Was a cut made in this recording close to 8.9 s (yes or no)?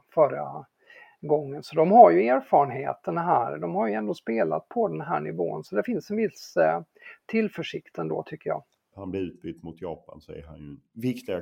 yes